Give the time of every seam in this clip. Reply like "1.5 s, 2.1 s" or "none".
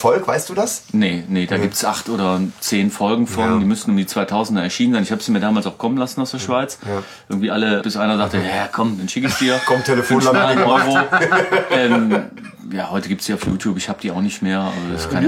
7.8 s